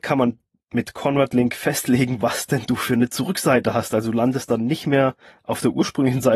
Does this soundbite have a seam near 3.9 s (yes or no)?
no